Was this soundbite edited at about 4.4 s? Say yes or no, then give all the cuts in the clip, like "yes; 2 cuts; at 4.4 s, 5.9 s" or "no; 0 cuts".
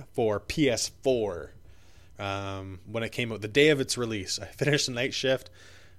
no; 1 cut; at 2.2 s